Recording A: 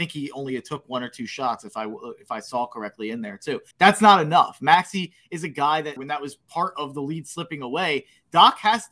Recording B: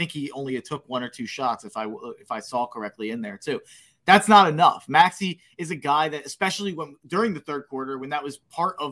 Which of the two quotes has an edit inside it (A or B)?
A